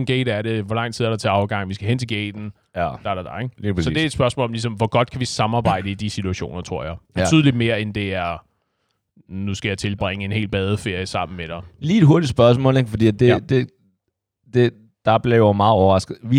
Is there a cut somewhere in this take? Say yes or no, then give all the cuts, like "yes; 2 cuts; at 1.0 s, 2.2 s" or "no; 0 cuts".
no; 0 cuts